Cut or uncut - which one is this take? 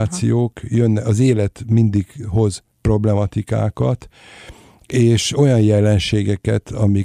cut